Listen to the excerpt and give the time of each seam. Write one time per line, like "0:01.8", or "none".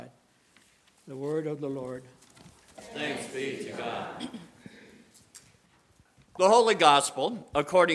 none